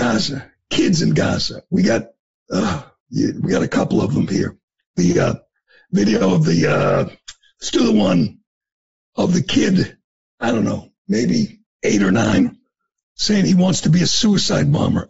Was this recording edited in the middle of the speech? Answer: no; 0 cuts

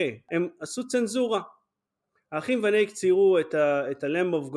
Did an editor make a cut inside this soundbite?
no; 0 cuts

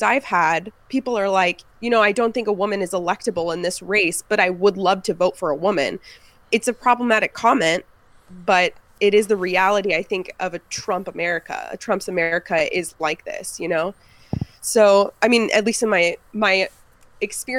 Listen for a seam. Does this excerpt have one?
no; 0 cuts

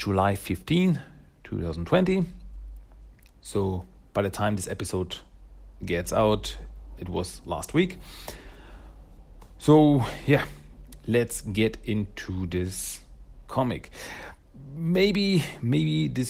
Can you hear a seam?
yes; 1 cut; at 7.0 s

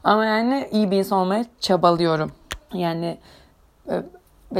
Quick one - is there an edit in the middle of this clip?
yes; 1 cut; at 2.7 s

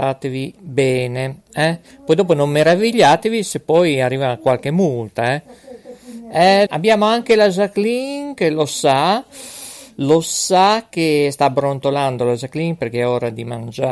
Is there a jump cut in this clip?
yes; 1 cut; at 6.7 s

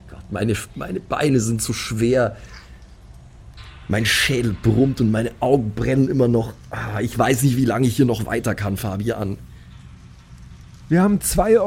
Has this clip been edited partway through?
no; 0 cuts

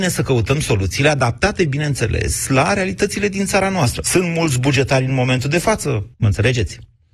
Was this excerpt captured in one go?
no; 2 cuts; at 4.0 s, 6.1 s

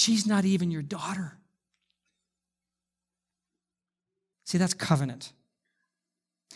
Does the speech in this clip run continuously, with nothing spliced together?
no; 1 cut; at 4.3 s

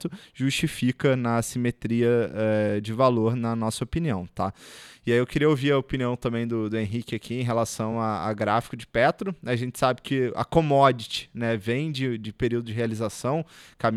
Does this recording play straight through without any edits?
yes; 0 cuts

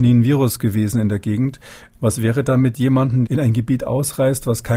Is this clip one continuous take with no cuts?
no; 2 cuts; at 1.9 s, 3.3 s

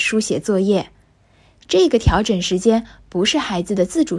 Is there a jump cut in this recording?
no; 0 cuts

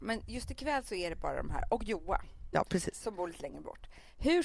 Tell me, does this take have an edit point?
yes; 1 cut; at 2.5 s

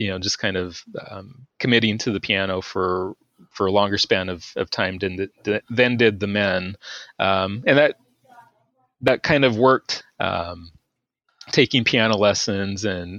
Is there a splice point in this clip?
yes; 1 cut; at 10.0 s

